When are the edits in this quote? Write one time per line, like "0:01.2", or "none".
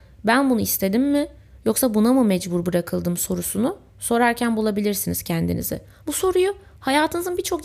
0:06.0